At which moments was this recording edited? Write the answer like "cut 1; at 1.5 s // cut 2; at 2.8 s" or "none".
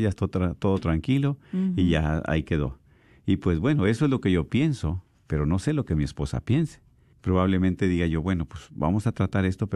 cut 1; at 7.1 s